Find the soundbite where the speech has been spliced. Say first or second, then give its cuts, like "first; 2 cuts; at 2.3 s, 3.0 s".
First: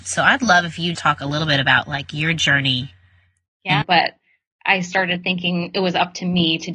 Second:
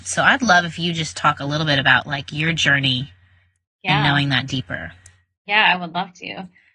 first; 2 cuts; at 0.9 s, 3.8 s